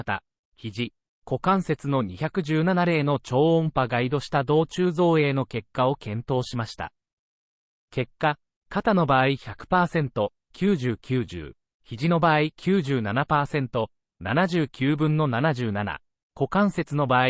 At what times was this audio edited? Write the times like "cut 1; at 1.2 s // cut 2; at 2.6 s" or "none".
none